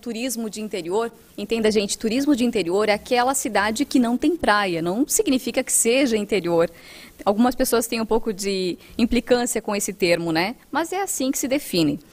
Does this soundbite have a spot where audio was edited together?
no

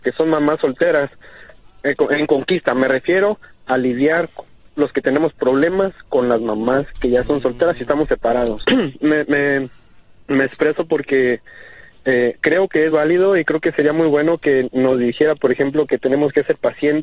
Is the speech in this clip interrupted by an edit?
yes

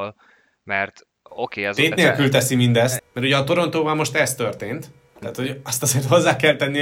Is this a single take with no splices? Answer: no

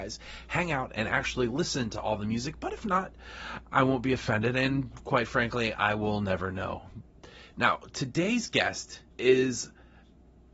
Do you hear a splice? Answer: yes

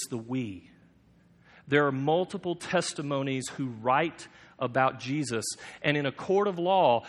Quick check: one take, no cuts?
yes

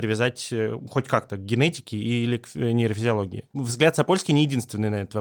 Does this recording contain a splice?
no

